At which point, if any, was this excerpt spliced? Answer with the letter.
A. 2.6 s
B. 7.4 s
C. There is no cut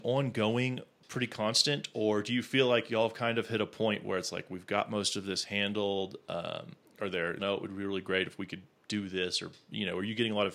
B